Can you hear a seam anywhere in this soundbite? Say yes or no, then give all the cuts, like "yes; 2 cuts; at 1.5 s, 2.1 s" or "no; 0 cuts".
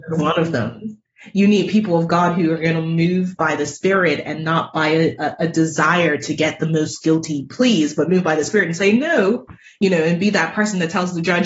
no; 0 cuts